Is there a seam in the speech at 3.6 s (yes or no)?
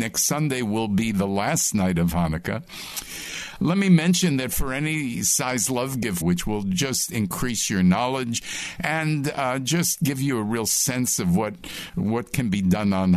no